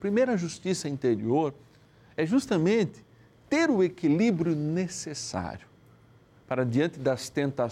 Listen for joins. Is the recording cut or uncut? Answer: uncut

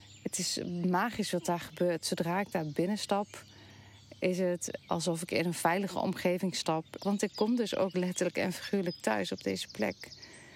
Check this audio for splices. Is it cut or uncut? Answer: cut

